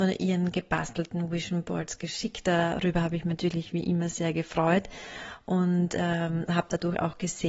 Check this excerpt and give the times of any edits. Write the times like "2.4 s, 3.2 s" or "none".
none